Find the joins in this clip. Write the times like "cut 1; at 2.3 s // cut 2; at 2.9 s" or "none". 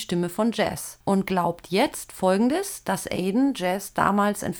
cut 1; at 1.0 s